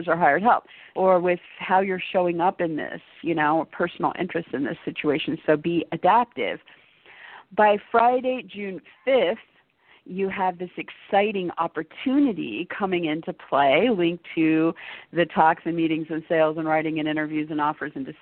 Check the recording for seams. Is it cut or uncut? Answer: cut